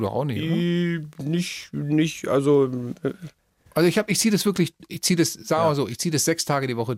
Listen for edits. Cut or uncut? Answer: uncut